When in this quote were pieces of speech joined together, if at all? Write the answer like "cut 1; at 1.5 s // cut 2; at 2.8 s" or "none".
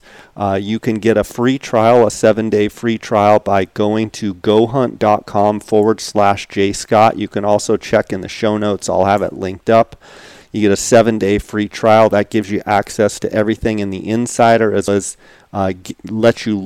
cut 1; at 14.9 s

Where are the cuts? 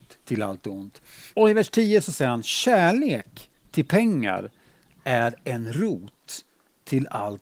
cut 1; at 1.3 s

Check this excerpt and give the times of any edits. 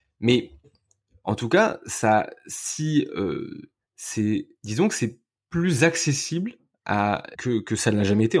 cut 1; at 3.9 s // cut 2; at 7.3 s

